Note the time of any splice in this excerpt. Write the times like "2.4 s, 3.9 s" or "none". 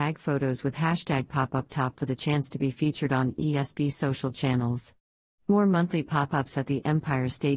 none